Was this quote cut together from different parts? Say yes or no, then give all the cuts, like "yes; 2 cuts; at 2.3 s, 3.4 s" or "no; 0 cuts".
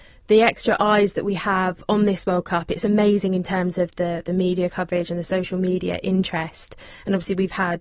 no; 0 cuts